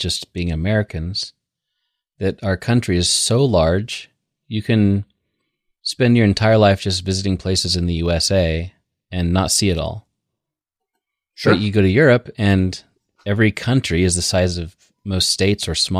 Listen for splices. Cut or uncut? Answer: uncut